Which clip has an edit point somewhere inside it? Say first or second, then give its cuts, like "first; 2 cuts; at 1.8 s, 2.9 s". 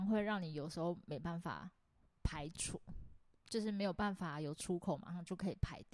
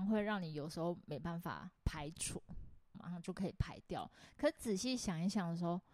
second; 2 cuts; at 1.8 s, 2.9 s